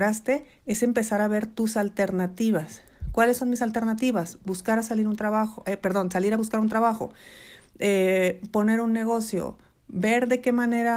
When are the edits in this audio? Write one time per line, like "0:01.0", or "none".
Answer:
none